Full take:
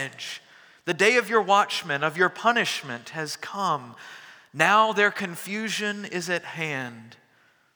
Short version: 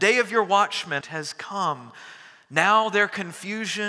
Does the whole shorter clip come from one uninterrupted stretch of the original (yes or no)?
no